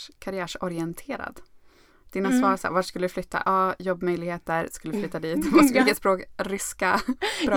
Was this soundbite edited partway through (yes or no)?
no